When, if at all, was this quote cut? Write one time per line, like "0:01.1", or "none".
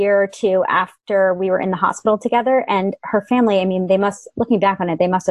none